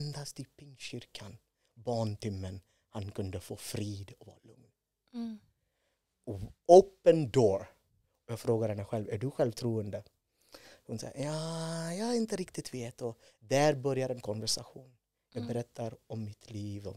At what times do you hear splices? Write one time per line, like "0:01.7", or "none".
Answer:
none